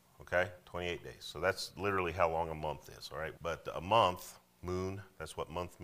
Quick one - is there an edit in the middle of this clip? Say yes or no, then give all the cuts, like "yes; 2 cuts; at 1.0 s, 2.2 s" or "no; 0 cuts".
yes; 1 cut; at 3.3 s